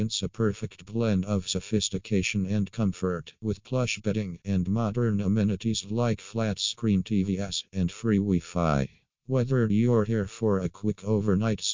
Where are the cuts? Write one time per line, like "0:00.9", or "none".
0:04.4
0:07.7